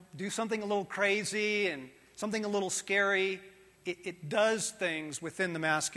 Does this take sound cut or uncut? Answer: uncut